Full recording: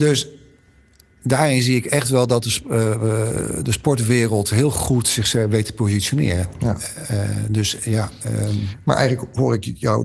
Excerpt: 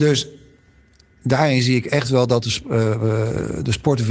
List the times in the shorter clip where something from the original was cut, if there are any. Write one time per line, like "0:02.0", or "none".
none